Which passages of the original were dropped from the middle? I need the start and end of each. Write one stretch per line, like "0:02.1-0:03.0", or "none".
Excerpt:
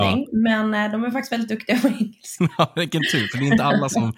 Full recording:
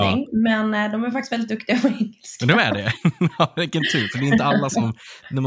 0:02.4-0:03.2